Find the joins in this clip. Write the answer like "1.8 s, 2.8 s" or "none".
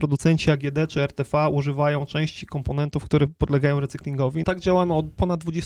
4.4 s